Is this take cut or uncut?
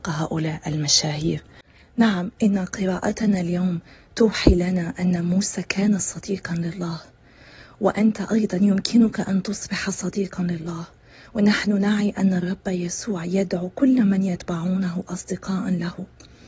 uncut